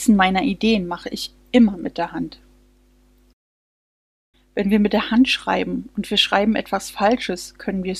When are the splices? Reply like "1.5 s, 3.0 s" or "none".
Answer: 4.3 s

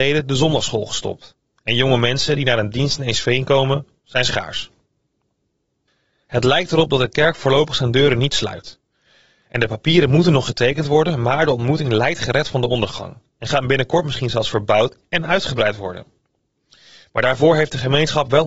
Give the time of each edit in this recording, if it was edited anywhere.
none

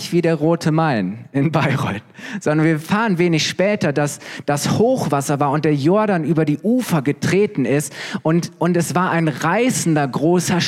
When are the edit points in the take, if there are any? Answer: none

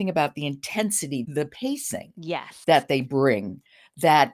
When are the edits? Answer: 1.2 s

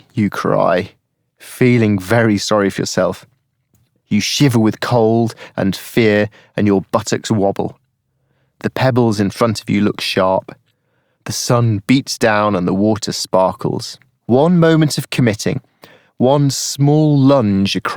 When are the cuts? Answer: 14.2 s

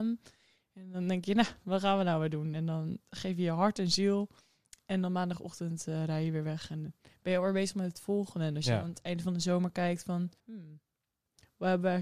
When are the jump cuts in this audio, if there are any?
10.4 s

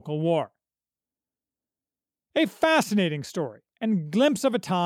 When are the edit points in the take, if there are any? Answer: none

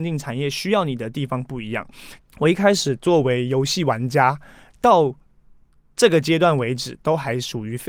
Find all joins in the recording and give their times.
2.2 s, 4.7 s

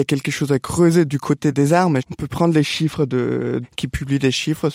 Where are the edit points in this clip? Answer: 2.0 s, 3.6 s

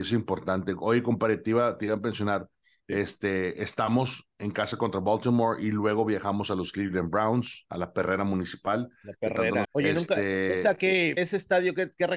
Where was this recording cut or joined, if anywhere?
9.6 s, 11.2 s

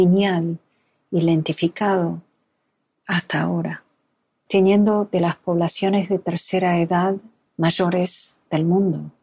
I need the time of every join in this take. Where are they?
4.5 s

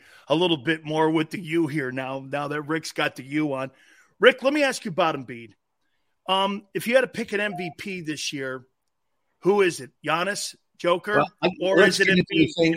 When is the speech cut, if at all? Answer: none

